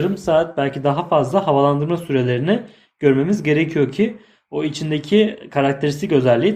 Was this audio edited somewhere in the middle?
no; 0 cuts

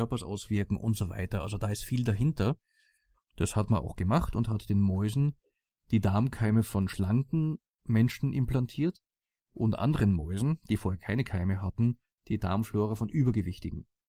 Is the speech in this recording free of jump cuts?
no; 1 cut; at 3.2 s

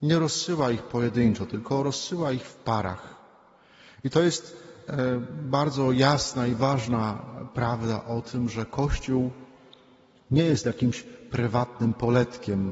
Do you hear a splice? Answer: no; 0 cuts

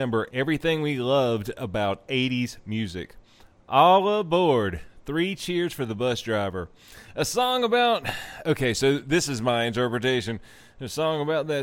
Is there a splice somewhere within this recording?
no; 0 cuts

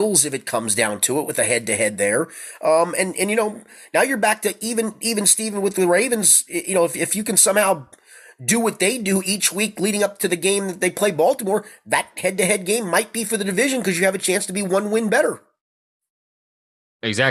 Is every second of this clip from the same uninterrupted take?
yes; 0 cuts

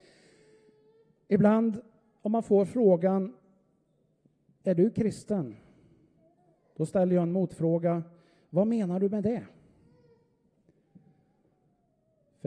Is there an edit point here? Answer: no; 0 cuts

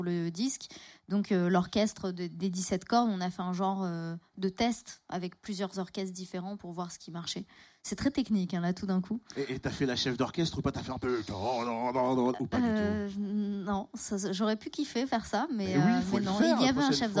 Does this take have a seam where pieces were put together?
no; 0 cuts

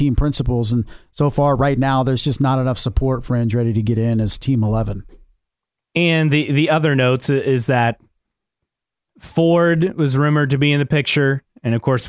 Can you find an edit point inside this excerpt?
no; 0 cuts

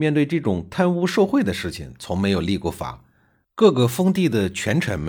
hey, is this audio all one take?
no; 1 cut; at 3.4 s

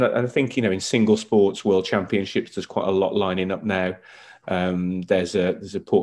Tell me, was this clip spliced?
no; 0 cuts

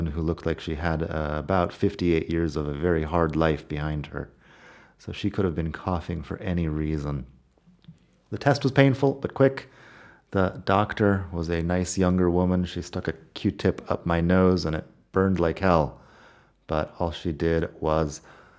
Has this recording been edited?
no; 0 cuts

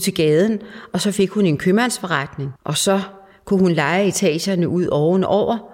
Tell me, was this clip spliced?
yes; 1 cut; at 2.6 s

